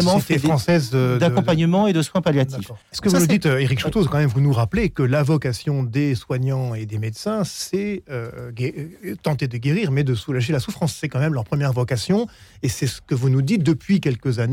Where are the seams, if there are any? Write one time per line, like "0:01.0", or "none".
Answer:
0:02.8